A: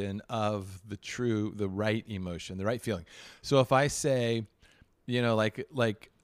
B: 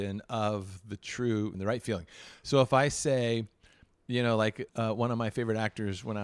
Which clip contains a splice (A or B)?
B